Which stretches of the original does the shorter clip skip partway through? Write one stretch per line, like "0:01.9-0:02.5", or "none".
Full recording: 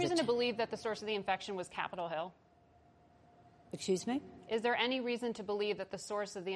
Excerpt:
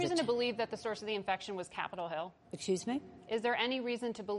0:02.4-0:03.6